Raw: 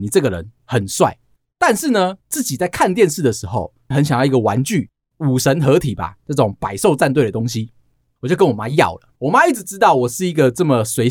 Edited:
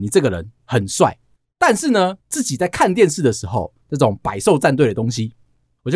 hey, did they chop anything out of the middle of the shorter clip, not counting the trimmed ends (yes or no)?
yes